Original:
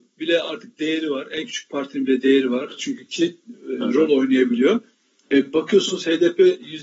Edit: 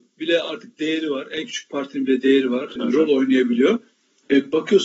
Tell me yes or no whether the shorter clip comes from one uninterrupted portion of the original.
no